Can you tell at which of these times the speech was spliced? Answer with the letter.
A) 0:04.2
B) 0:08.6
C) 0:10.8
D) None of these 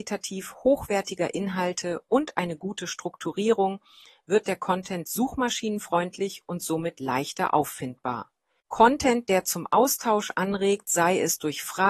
B